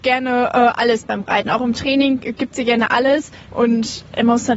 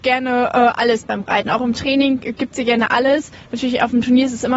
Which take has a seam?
first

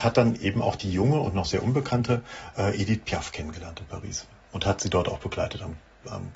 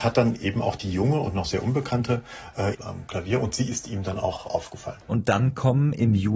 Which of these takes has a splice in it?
second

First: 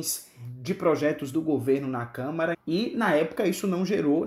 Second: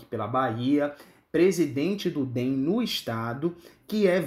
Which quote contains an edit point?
first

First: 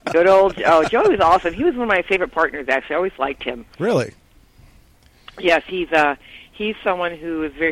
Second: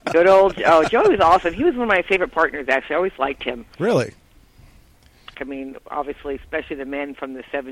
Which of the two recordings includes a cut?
second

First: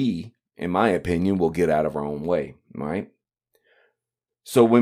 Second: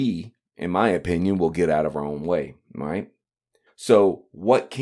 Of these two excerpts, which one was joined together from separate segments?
second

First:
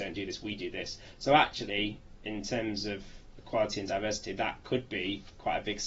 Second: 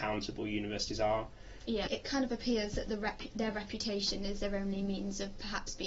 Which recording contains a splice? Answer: second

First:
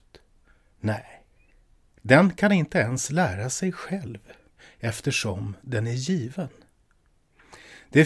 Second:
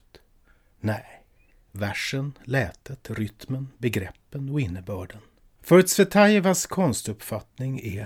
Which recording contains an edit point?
second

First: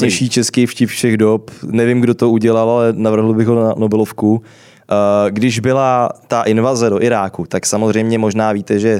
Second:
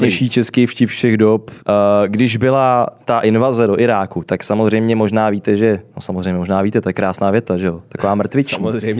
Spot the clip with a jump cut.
second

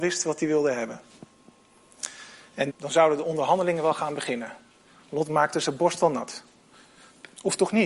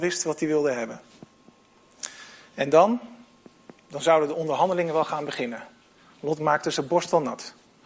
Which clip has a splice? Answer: first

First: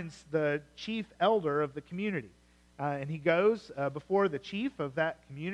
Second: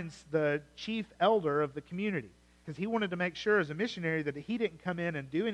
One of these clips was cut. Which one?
second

